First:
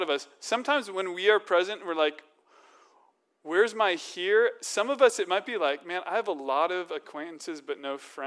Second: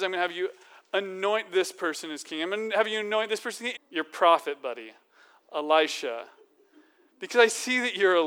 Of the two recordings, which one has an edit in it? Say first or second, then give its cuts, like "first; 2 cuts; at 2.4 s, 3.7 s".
second; 1 cut; at 3.7 s